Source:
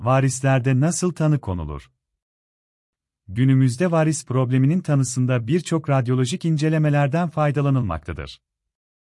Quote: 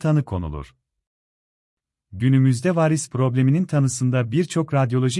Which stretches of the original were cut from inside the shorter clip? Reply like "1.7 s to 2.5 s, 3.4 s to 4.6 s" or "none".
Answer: none